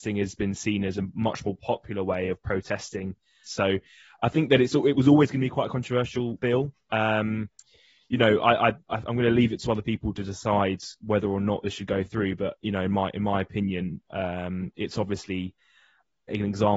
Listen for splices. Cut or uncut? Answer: cut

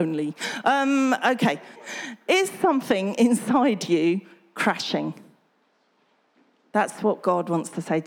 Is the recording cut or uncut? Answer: cut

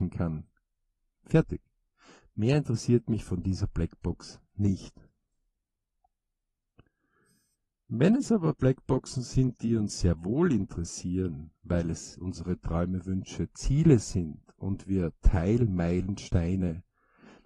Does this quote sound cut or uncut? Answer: cut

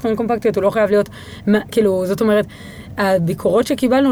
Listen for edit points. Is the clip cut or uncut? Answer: uncut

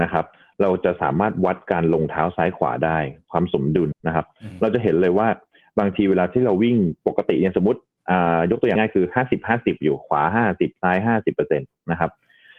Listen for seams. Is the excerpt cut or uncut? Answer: cut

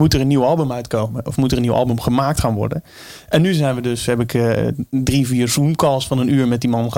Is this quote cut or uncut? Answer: uncut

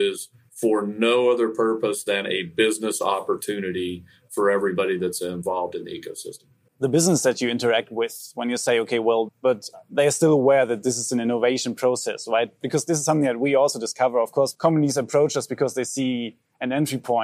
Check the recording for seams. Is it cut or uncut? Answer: cut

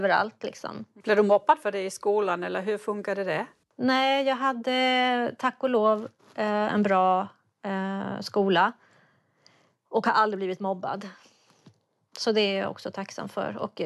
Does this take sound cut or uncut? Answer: uncut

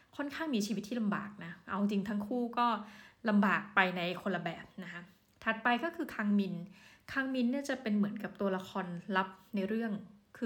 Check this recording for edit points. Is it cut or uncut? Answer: uncut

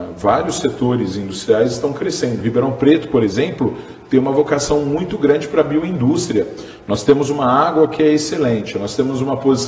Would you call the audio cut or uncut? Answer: uncut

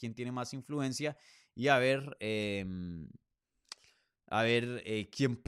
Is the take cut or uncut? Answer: uncut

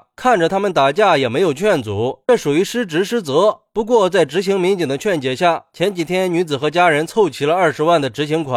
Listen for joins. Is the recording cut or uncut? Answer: uncut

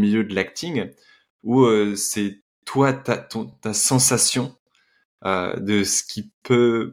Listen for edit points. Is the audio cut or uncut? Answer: uncut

